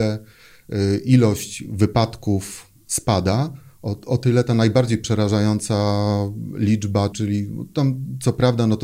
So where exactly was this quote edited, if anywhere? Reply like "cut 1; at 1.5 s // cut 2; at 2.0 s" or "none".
cut 1; at 7.1 s